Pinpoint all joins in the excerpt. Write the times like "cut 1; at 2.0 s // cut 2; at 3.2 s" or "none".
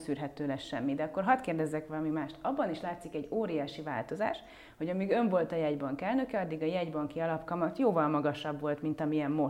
none